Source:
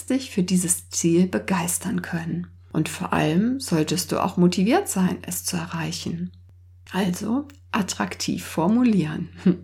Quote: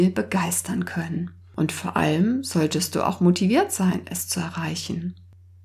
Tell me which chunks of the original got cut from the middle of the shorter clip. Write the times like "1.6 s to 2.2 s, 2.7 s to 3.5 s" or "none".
none